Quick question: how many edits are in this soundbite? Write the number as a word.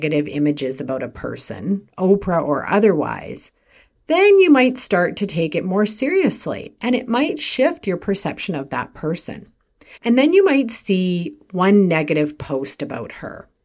one